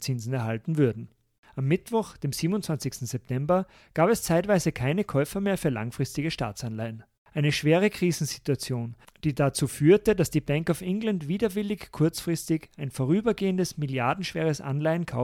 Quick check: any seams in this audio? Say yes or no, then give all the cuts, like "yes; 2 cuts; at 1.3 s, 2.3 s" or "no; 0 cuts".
no; 0 cuts